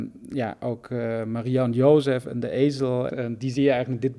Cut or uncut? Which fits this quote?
cut